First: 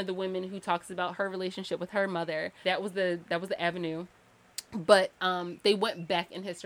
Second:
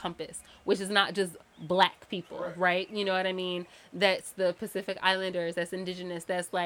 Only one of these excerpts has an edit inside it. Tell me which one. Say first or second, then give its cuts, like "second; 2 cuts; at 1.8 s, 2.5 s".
first; 1 cut; at 2.6 s